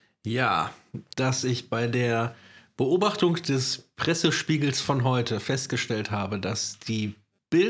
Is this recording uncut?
no; 1 cut; at 1.1 s

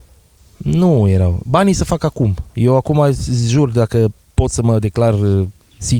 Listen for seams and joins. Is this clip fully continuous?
yes; 0 cuts

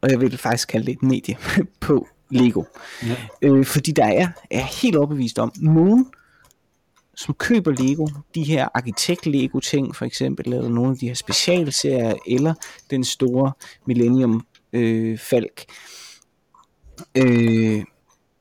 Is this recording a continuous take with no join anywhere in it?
yes; 0 cuts

